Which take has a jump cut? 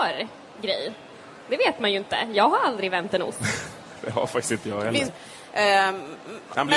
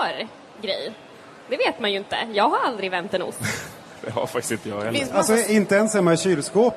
first; 1 cut; at 5.1 s

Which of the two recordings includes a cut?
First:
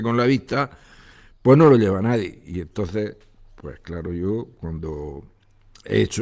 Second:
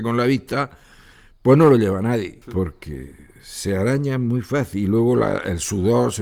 second; 1 cut; at 2.4 s

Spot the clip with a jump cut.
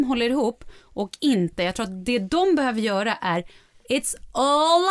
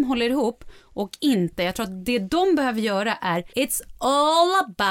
second; 1 cut; at 3.5 s

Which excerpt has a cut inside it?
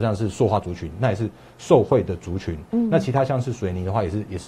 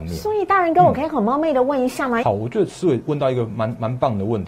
second; 1 cut; at 2.2 s

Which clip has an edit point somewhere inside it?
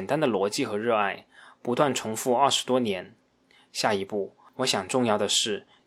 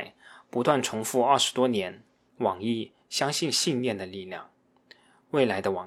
second; 1 cut; at 2.3 s

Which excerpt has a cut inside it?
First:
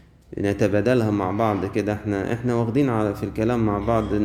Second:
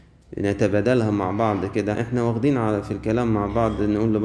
second; 1 cut; at 1.9 s

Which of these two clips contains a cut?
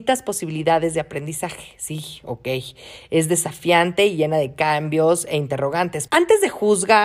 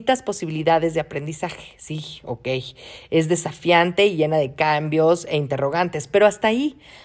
first; 1 cut; at 6.1 s

